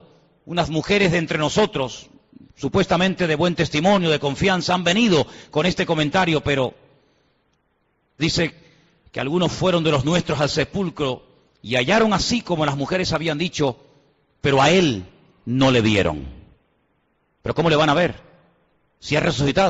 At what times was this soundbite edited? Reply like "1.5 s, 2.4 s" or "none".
8.2 s